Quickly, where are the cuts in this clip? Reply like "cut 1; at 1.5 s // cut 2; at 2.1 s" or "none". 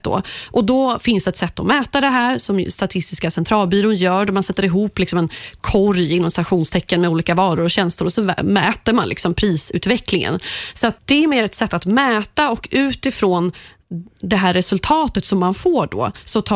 cut 1; at 11.0 s

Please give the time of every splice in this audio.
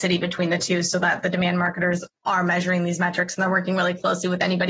none

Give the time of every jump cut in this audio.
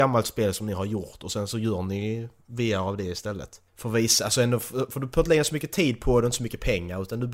cut 1; at 3.7 s

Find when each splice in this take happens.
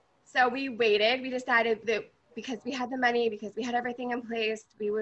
none

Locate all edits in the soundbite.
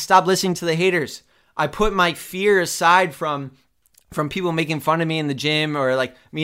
none

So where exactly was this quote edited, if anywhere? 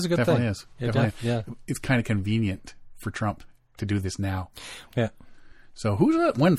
cut 1; at 1.6 s // cut 2; at 4.9 s

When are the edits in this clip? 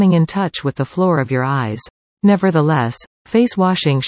cut 1; at 2.1 s

